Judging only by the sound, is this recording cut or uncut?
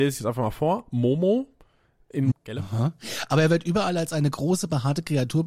cut